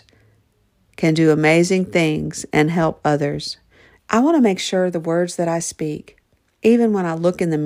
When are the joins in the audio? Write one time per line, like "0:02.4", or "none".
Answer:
0:04.0
0:06.6